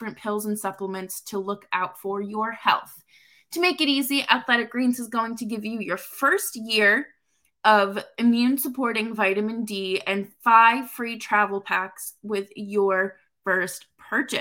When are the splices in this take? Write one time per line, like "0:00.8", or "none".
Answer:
none